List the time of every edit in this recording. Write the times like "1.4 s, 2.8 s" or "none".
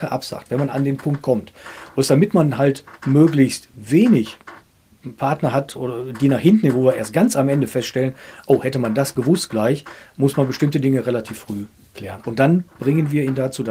12.2 s

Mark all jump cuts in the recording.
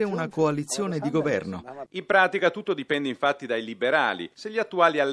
1.9 s

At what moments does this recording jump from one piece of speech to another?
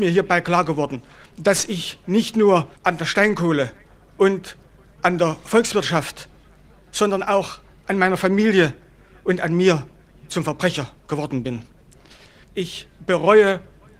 2.8 s, 12.4 s

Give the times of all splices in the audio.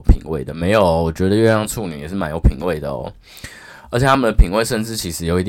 none

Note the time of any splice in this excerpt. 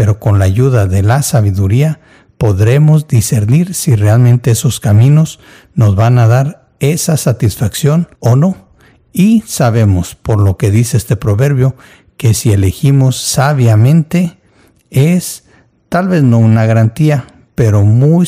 8.1 s

